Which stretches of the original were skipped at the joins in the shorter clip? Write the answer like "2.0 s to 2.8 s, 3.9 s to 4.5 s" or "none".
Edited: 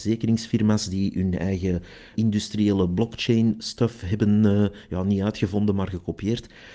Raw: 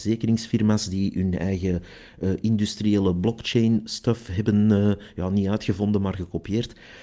2.1 s to 2.4 s